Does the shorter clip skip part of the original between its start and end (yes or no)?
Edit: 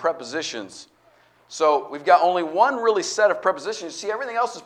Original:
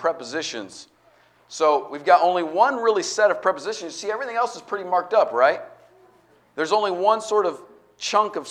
no